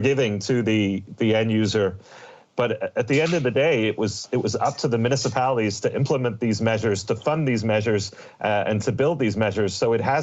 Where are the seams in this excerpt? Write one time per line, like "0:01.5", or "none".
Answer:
none